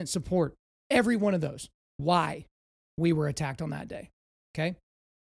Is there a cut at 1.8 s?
yes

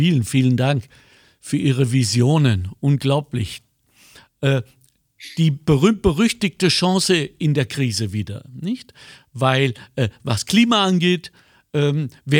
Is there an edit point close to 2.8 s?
no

